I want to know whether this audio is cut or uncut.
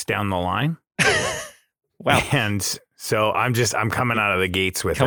uncut